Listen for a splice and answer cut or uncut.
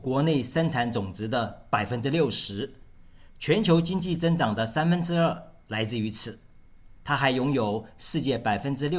cut